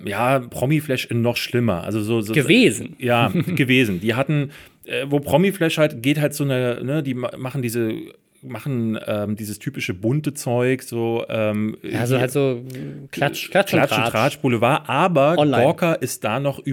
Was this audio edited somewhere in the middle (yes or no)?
no